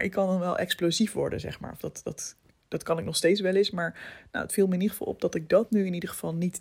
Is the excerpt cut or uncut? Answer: uncut